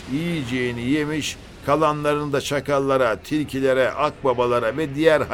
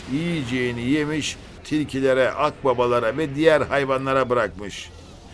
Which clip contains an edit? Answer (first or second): second